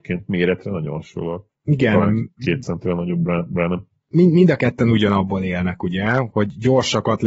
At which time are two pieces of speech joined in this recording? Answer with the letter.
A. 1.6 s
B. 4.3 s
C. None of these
C